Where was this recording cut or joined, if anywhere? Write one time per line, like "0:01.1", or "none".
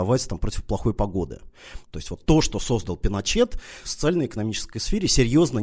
0:01.8
0:03.8